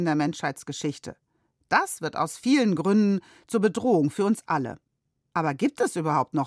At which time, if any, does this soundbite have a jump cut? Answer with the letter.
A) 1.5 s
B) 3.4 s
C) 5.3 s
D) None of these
C